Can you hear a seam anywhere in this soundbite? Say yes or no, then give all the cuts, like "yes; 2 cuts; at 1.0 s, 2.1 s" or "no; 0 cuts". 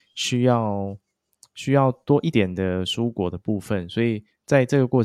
yes; 1 cut; at 2.3 s